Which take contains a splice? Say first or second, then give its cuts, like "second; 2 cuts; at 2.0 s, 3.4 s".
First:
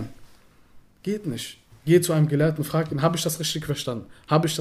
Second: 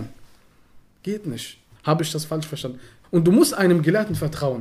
second; 2 cuts; at 1.8 s, 3.0 s